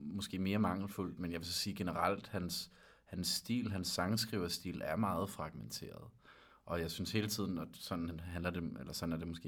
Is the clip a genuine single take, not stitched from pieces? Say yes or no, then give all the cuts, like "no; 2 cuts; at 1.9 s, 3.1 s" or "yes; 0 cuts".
yes; 0 cuts